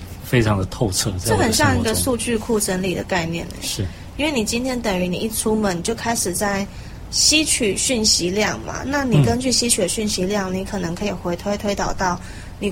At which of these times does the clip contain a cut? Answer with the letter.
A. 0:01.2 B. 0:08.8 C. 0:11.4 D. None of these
D